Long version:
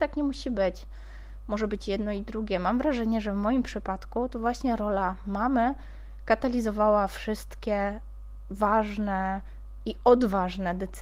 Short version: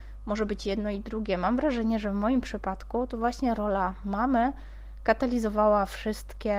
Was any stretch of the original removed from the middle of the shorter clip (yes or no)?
no